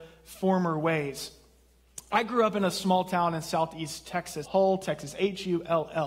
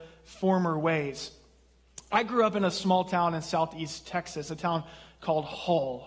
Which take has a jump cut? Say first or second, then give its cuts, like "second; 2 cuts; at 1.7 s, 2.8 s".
first; 1 cut; at 4.4 s